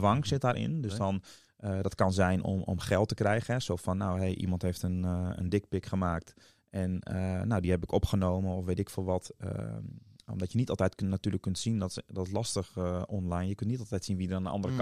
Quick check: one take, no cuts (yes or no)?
yes